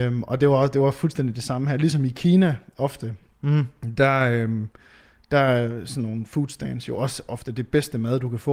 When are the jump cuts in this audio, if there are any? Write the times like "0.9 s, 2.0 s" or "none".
none